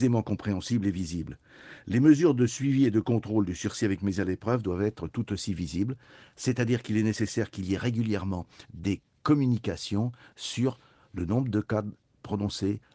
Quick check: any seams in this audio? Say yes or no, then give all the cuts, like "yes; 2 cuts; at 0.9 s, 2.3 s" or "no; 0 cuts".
yes; 1 cut; at 8.6 s